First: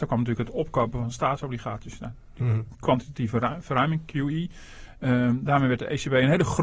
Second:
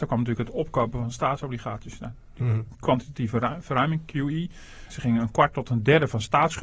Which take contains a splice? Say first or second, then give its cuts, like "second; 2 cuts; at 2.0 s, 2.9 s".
second; 1 cut; at 4.9 s